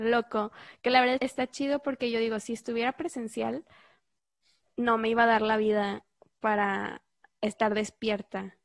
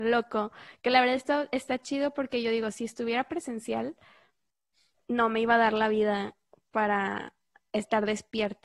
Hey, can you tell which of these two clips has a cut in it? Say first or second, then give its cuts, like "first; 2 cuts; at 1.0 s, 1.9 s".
first; 1 cut; at 1.2 s